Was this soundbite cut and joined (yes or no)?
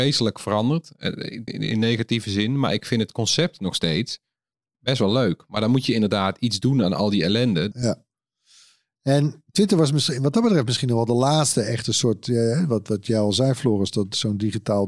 yes